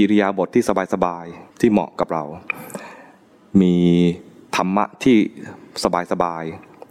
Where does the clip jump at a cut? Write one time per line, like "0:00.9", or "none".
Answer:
0:01.5